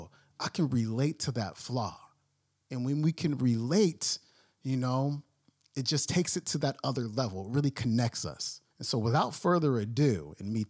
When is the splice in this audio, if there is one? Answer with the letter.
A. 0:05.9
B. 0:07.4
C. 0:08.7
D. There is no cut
C